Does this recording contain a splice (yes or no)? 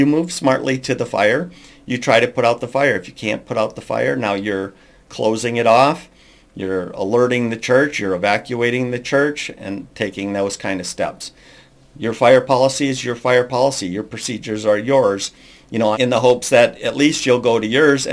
yes